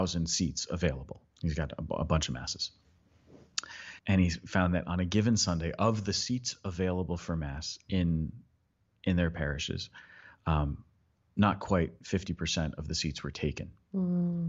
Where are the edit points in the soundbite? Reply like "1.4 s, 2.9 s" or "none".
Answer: 1.3 s, 4.0 s